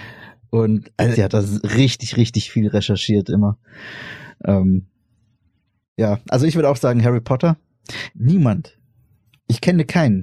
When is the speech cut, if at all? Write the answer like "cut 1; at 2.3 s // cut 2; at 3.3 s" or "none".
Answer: cut 1; at 1.1 s // cut 2; at 8.1 s